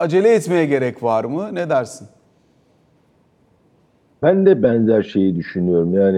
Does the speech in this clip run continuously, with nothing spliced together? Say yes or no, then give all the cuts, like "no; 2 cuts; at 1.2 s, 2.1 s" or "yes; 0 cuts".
yes; 0 cuts